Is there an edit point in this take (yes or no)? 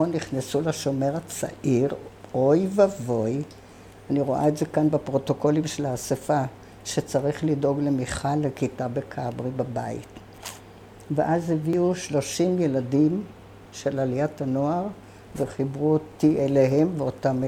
no